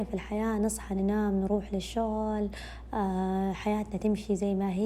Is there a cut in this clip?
no; 0 cuts

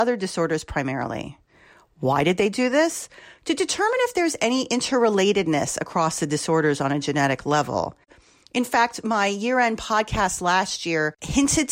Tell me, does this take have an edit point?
no; 0 cuts

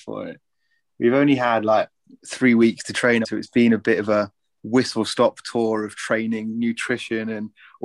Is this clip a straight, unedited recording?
no; 1 cut; at 3.2 s

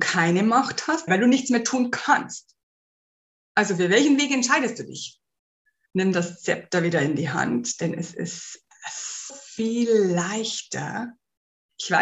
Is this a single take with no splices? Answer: no; 3 cuts; at 1.1 s, 5.9 s, 9.3 s

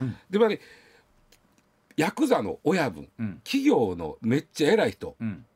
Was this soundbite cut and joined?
no; 0 cuts

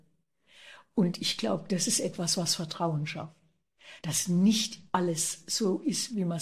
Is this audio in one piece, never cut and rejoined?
yes; 0 cuts

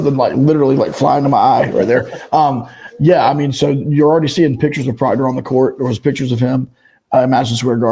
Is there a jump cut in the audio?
no; 0 cuts

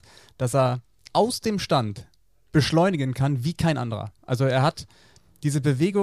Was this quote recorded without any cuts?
yes; 0 cuts

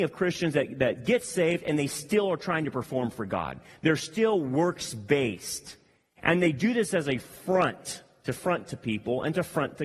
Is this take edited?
no; 0 cuts

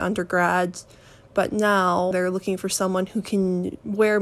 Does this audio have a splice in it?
yes; 1 cut; at 2.1 s

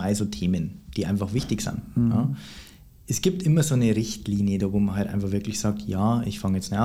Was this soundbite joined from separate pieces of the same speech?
no; 0 cuts

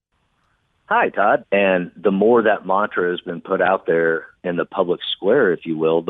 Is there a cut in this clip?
yes; 1 cut; at 1.4 s

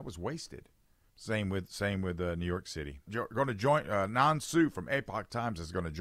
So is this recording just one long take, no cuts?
no; 2 cuts; at 1.1 s, 3.1 s

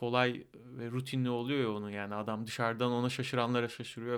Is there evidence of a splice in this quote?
no; 0 cuts

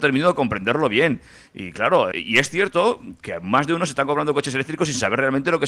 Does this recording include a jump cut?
yes; 1 cut; at 2.1 s

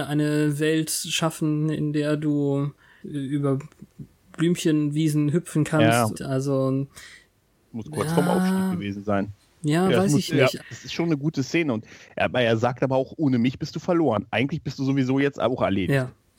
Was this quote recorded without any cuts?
no; 3 cuts; at 3.0 s, 6.1 s, 10.6 s

